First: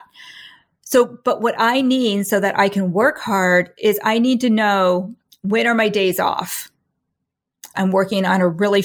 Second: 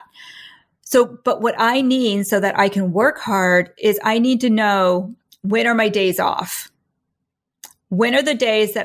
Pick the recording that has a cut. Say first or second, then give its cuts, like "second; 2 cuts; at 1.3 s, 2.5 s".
first; 1 cut; at 7.7 s